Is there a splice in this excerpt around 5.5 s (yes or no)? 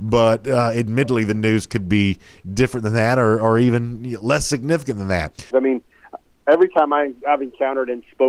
yes